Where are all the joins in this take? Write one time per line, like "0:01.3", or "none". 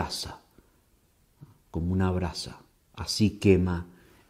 none